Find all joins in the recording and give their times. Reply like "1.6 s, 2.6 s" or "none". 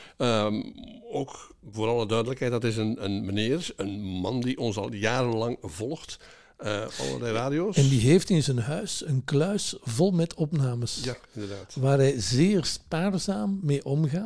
6.9 s